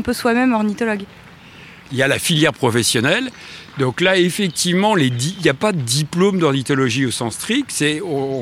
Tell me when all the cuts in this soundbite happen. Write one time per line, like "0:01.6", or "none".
0:01.8